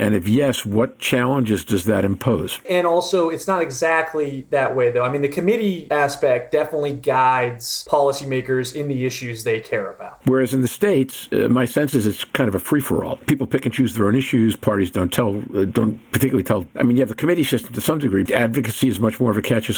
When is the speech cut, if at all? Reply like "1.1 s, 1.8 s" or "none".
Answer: 2.6 s, 10.2 s, 18.3 s